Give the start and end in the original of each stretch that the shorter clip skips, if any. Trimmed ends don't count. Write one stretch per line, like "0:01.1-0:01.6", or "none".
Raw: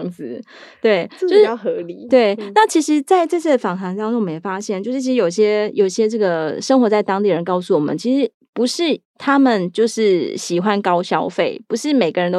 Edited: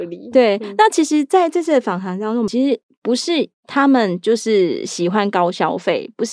0:04.3-0:08.0